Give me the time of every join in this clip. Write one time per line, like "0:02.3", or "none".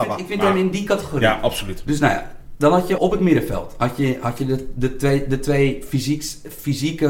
0:03.0